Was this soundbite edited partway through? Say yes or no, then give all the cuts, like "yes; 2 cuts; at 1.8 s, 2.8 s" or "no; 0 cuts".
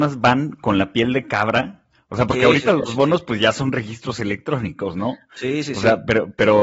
no; 0 cuts